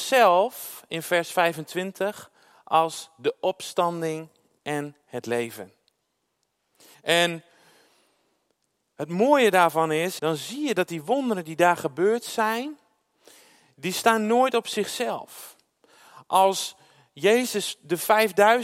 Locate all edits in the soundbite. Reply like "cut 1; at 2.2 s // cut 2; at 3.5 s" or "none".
cut 1; at 6.9 s // cut 2; at 10.2 s